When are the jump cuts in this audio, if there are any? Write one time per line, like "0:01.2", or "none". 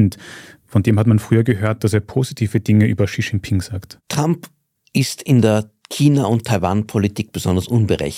0:01.8